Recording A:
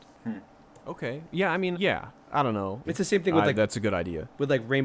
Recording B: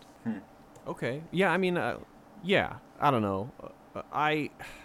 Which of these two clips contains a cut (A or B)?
A